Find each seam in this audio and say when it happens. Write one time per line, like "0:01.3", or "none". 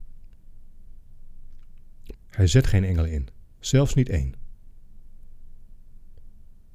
0:02.1